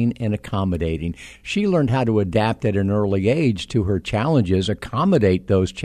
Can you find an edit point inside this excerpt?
no; 0 cuts

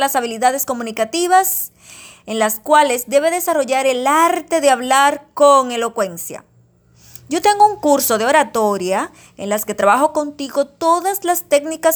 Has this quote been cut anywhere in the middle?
no; 0 cuts

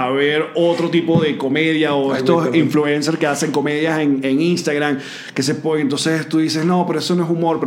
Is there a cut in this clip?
no; 0 cuts

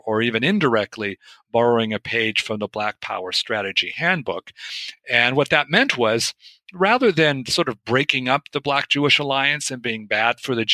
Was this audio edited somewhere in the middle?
no; 0 cuts

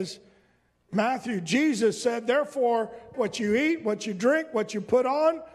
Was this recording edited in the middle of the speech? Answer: yes; 1 cut; at 3.1 s

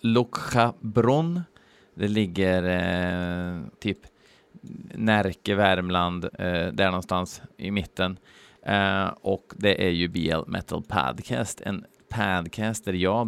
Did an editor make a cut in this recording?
yes; 3 cuts; at 3.7 s, 6.3 s, 8.6 s

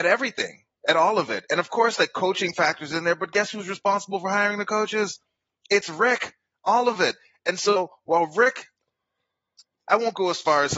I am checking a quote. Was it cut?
no; 0 cuts

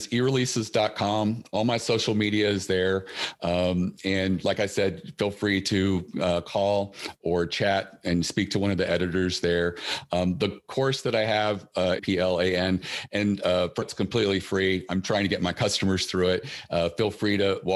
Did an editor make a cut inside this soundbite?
yes; 2 cuts; at 12.0 s, 13.8 s

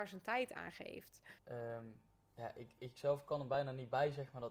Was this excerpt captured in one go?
no; 2 cuts; at 1.4 s, 2.8 s

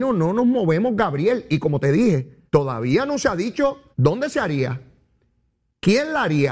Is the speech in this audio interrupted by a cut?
yes; 2 cuts; at 2.5 s, 3.9 s

